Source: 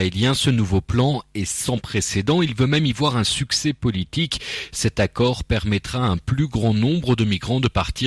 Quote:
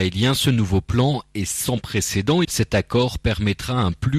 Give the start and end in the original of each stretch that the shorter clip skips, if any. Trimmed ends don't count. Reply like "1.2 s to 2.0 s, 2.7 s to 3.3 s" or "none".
2.4 s to 4.7 s

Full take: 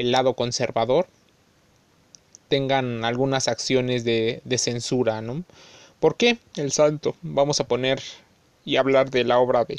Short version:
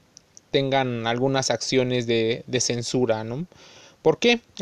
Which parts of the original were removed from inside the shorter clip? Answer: none

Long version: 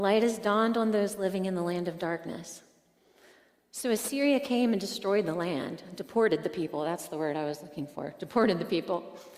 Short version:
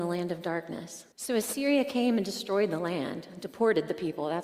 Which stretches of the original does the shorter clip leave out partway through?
2.7 s to 3.7 s

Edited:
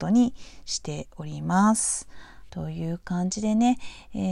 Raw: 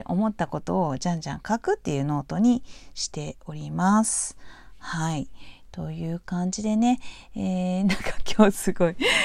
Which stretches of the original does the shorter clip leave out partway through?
4.8 s to 5.7 s

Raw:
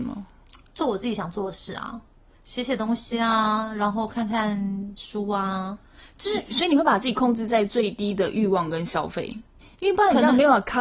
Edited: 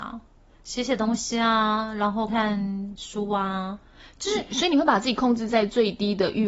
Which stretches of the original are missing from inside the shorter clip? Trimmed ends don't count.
4.1 s to 4.3 s

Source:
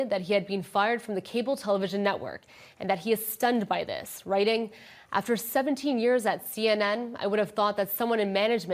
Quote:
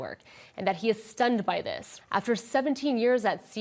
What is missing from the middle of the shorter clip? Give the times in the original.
4.2 s to 5.0 s

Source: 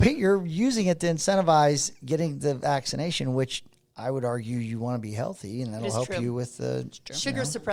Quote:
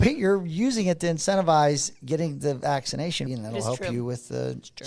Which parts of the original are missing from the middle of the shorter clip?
3.3 s to 5.6 s

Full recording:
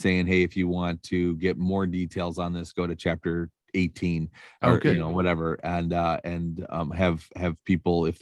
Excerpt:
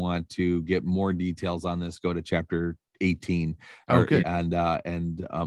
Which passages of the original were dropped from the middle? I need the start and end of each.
5.0 s to 5.6 s

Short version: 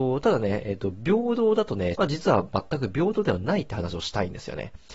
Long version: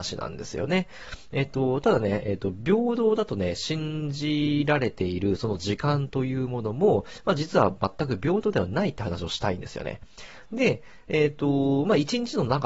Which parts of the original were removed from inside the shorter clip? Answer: 3.6 s to 7.2 s

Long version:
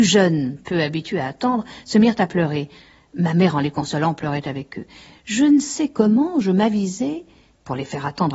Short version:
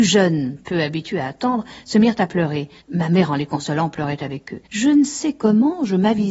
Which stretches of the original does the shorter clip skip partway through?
2.8 s to 3.0 s, 4.9 s to 5.2 s

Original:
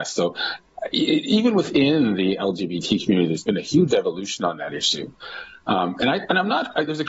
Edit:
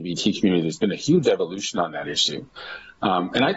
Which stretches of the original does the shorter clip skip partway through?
none

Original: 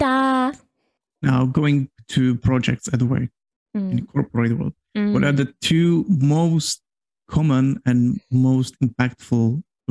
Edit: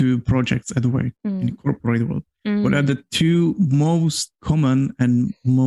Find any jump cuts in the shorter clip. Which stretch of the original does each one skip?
3.3 s to 3.7 s, 6.8 s to 7.2 s

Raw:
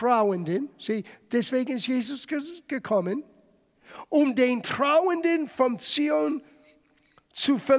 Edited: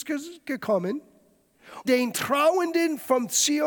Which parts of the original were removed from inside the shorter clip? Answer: 4.1 s to 4.3 s

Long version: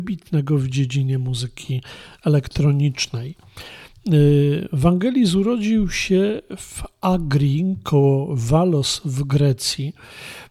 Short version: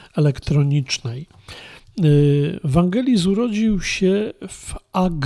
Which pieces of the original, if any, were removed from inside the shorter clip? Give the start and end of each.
none

